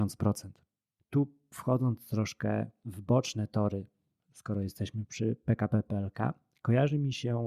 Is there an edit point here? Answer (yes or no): yes